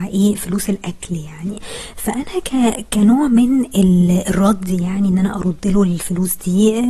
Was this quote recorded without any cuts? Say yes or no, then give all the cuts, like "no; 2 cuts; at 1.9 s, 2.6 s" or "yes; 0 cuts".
yes; 0 cuts